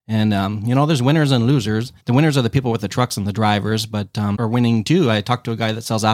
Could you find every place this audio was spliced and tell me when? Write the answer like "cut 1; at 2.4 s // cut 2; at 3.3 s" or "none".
cut 1; at 2.0 s // cut 2; at 4.3 s